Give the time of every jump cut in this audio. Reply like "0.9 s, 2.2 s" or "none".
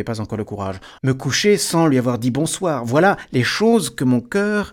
1.0 s